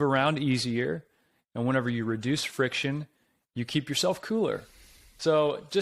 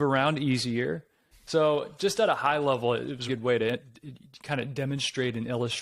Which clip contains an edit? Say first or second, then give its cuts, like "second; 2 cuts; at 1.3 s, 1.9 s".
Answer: second; 2 cuts; at 1.3 s, 3.3 s